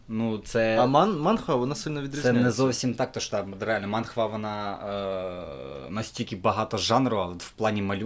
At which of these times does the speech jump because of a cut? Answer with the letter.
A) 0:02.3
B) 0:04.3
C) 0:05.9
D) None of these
D